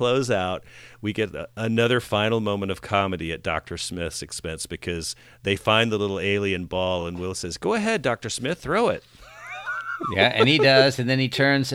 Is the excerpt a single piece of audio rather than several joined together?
yes; 0 cuts

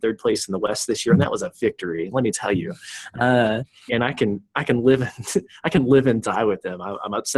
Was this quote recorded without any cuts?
no; 1 cut; at 3.9 s

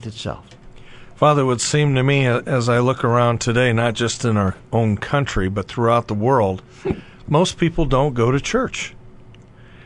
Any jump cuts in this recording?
no; 0 cuts

